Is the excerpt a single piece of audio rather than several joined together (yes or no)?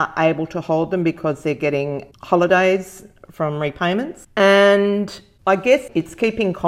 yes